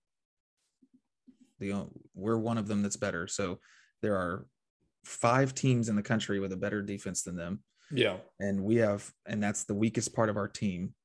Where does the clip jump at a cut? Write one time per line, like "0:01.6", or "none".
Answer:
0:01.6